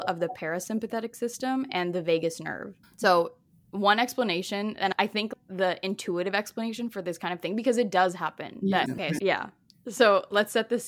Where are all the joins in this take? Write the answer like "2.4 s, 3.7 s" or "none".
2.8 s, 8.9 s